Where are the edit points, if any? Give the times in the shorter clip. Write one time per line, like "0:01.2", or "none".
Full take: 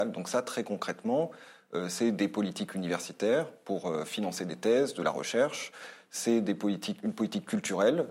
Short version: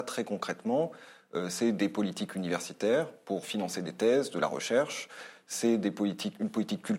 0:03.4